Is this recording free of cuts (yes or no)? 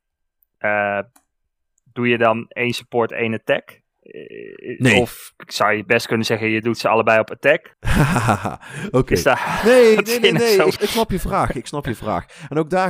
no